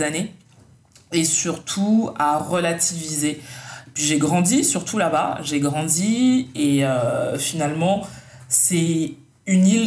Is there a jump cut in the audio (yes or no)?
no